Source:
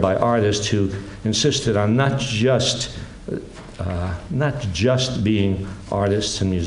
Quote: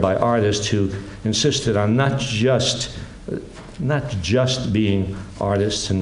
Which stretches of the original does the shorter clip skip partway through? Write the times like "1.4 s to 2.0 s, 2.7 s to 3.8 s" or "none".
3.8 s to 4.3 s